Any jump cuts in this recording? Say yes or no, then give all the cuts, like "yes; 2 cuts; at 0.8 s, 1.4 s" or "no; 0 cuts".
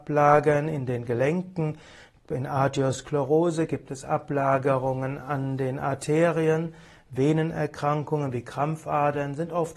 no; 0 cuts